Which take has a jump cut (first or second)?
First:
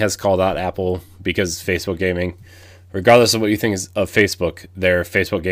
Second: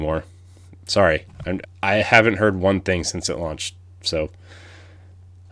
second